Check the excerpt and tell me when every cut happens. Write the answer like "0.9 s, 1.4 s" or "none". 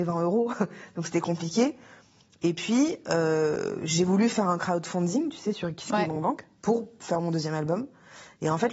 none